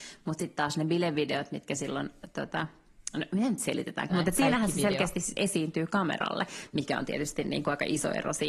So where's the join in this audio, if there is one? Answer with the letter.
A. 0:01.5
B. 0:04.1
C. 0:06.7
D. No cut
B